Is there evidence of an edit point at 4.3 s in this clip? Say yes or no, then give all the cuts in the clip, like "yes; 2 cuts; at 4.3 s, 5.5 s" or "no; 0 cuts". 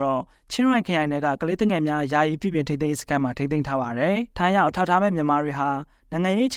yes; 1 cut; at 4.3 s